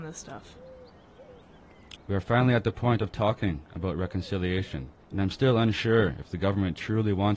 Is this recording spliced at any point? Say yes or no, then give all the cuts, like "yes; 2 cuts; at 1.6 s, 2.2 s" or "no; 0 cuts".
yes; 2 cuts; at 2.0 s, 5.0 s